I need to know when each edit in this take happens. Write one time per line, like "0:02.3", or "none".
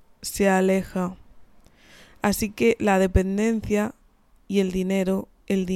none